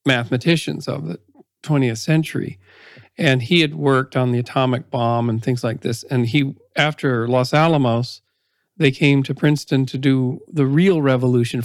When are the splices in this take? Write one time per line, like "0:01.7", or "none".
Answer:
none